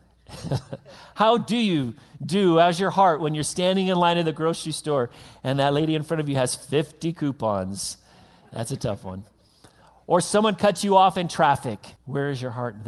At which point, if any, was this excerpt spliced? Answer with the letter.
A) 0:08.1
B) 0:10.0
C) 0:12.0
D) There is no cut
C